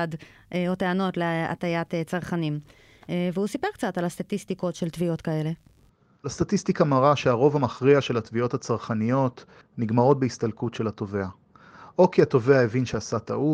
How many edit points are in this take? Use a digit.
1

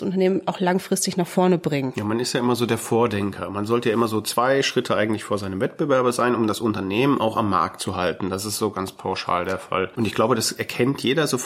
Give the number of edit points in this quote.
0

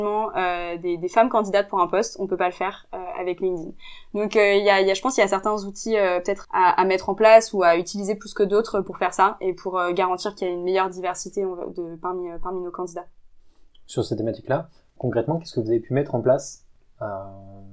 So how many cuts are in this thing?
1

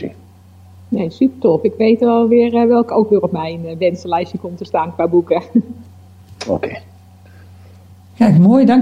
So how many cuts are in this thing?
0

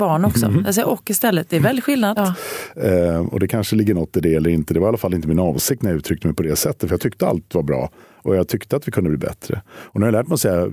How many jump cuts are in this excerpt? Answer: 1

